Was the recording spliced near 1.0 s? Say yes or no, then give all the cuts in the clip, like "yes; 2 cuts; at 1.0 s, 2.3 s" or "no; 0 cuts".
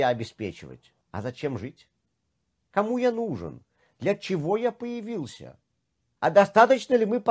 yes; 2 cuts; at 1.0 s, 6.2 s